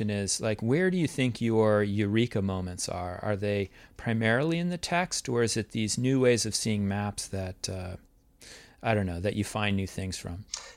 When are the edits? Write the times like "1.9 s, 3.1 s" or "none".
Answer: none